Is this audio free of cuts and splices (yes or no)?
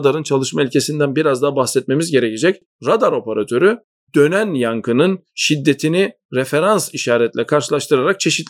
yes